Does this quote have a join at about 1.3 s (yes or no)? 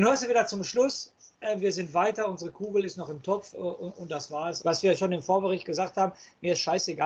no